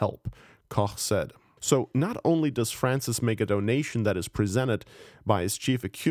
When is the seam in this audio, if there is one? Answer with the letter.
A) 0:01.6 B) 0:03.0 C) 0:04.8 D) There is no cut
A